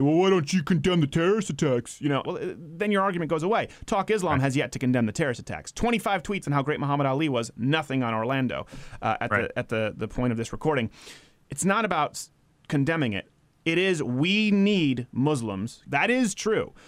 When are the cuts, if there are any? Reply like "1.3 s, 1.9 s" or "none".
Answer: 2.2 s, 15.8 s